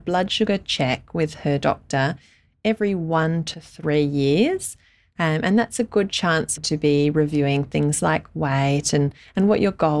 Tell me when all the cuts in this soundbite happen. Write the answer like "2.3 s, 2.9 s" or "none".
6.6 s

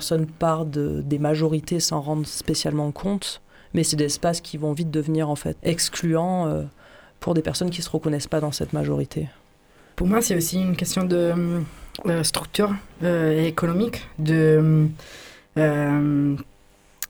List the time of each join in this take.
5.6 s

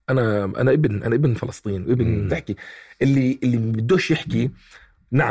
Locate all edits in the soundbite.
2.3 s

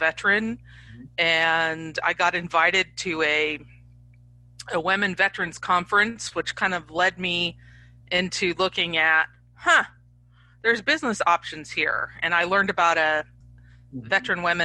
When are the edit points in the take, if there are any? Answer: 13.4 s

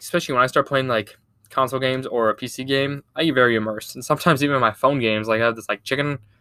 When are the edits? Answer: none

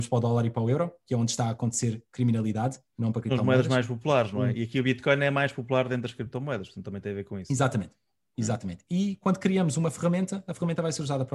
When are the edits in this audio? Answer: none

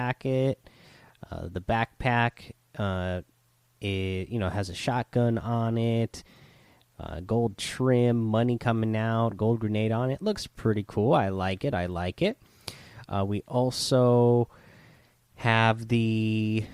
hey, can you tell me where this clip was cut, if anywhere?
none

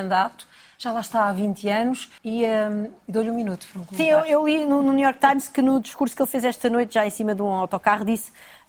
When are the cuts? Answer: 2.2 s

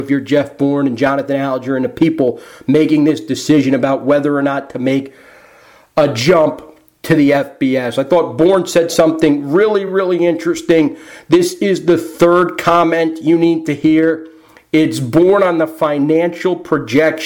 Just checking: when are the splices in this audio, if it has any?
none

